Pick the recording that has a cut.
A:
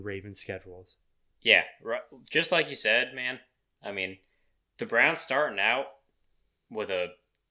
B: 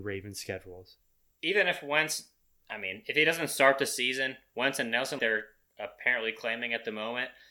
B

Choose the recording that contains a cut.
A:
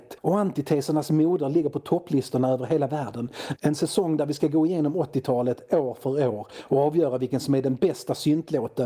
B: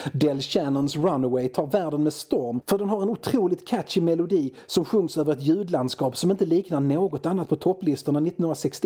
A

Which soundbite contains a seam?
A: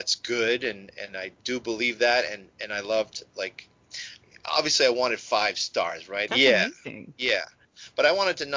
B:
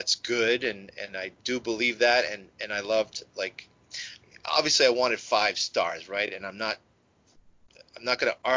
A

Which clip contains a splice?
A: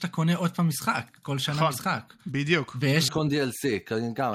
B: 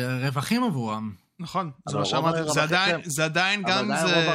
A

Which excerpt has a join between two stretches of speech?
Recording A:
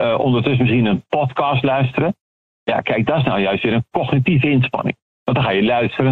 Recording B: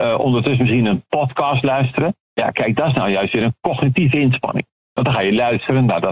B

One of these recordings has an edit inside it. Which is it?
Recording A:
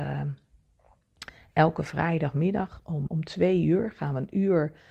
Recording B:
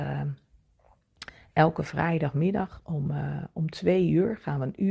A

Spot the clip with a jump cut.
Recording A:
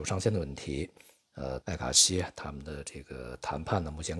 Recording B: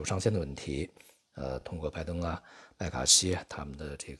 A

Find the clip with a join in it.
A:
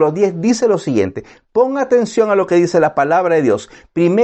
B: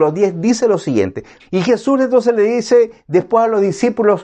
B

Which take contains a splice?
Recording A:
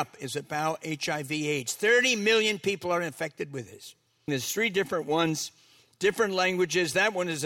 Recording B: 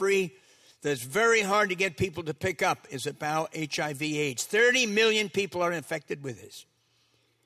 A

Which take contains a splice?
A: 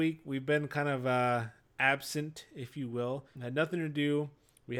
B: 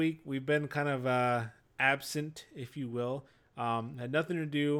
A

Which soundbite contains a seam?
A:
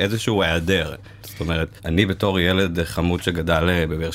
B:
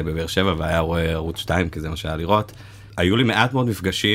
A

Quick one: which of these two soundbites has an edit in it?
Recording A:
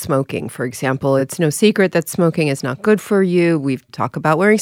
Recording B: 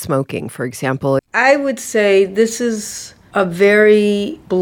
B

